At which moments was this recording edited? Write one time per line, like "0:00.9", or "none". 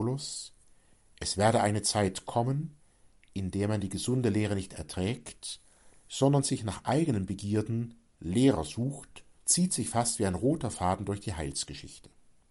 0:09.4

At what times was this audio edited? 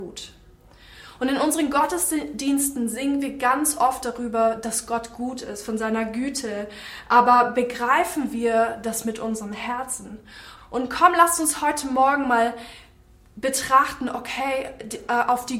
0:10.6

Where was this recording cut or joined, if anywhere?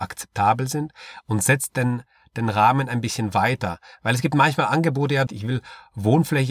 0:05.3

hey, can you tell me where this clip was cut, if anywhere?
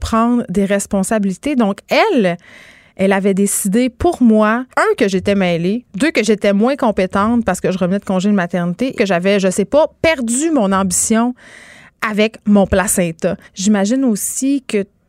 0:04.7
0:08.9
0:13.4

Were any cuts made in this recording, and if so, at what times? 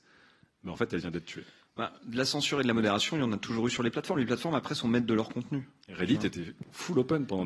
none

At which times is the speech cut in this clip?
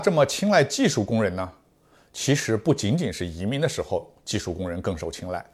none

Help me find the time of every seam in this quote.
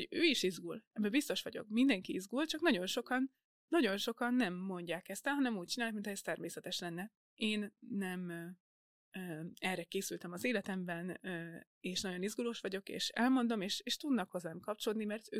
0:07.2

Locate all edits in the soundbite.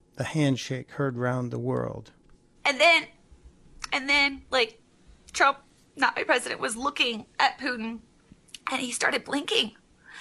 0:04.5

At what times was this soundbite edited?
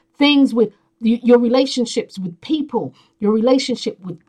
none

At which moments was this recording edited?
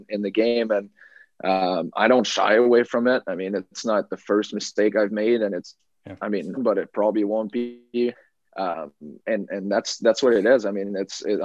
0:06.6

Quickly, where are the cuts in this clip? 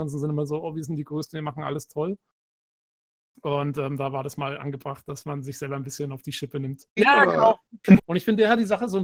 0:07.0
0:08.0

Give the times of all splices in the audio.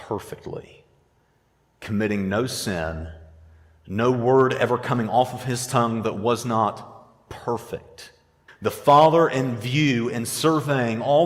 0:08.5

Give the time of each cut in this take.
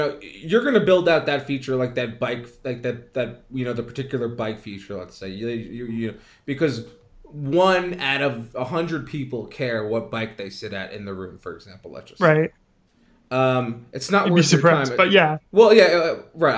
none

